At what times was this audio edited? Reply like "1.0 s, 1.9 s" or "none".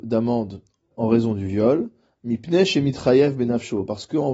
0.9 s